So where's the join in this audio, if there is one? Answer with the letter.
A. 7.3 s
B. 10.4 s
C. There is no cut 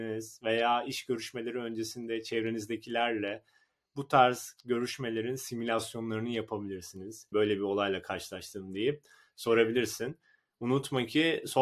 A